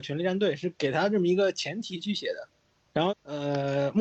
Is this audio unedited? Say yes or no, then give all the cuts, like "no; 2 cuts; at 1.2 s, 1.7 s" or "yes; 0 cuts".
no; 1 cut; at 3.1 s